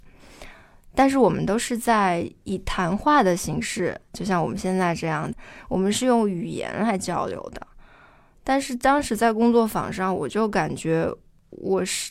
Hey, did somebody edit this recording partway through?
yes; 1 cut; at 5.3 s

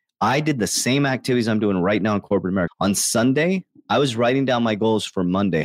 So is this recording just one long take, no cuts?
no; 1 cut; at 2.7 s

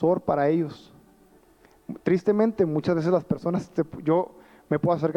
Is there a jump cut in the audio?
no; 0 cuts

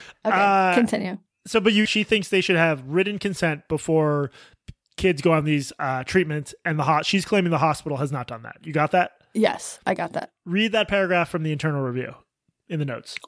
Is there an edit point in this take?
yes; 1 cut; at 1.9 s

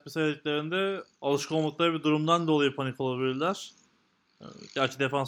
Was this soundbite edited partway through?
yes; 1 cut; at 1.1 s

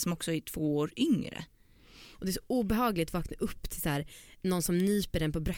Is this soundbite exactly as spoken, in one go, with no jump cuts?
no; 1 cut; at 2.1 s

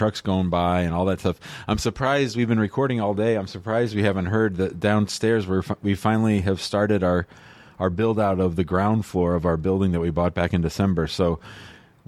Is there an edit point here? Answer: no; 0 cuts

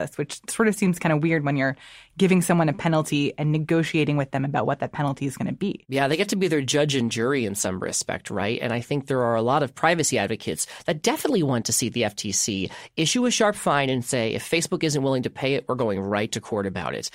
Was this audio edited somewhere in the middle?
no; 0 cuts

